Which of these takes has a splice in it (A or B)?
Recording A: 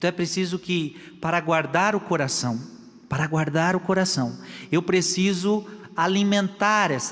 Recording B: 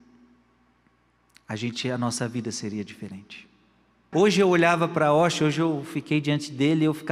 B